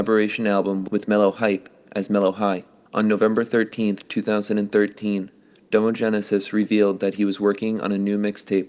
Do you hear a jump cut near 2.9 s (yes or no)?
yes